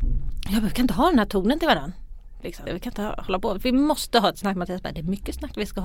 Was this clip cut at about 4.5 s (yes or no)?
no